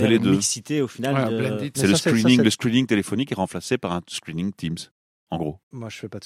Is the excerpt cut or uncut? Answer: cut